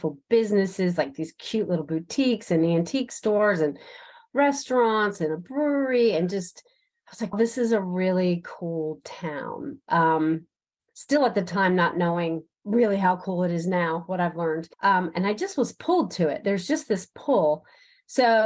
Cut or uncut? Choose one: cut